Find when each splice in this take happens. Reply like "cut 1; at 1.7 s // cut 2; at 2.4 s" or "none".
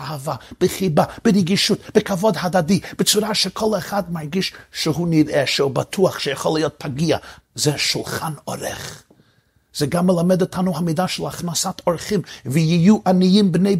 cut 1; at 7.4 s

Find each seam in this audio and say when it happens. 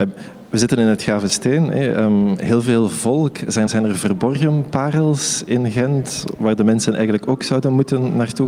cut 1; at 3.7 s

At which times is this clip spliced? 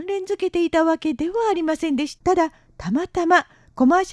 cut 1; at 2.2 s

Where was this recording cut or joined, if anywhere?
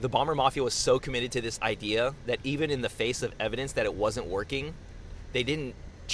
none

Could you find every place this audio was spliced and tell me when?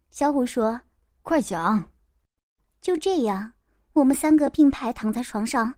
none

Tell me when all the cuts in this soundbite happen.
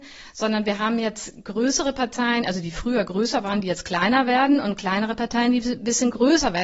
none

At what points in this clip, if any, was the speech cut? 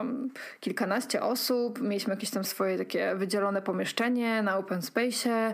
cut 1; at 2.4 s

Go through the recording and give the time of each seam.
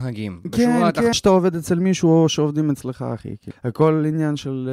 cut 1; at 1.1 s // cut 2; at 3.5 s

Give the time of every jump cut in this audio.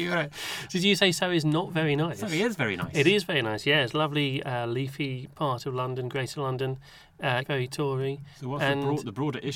cut 1; at 7.4 s

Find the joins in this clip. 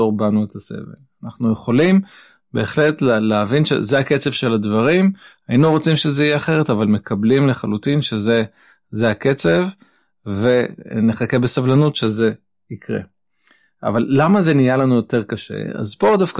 none

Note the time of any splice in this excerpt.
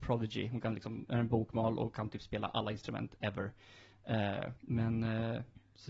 cut 1; at 1.1 s // cut 2; at 4.6 s

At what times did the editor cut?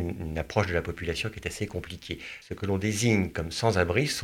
cut 1; at 2.4 s

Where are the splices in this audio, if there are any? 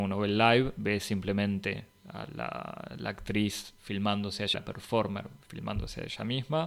cut 1; at 4.5 s

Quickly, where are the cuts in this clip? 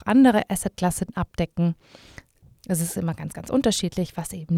none

